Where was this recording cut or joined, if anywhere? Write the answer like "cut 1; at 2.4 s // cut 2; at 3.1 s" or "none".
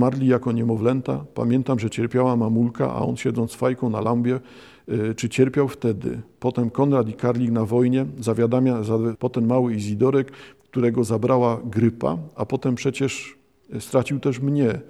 cut 1; at 9.2 s